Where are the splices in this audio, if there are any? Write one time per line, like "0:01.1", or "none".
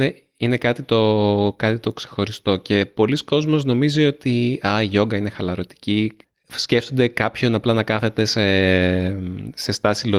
none